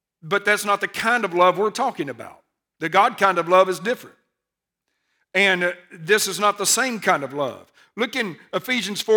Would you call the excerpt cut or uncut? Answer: uncut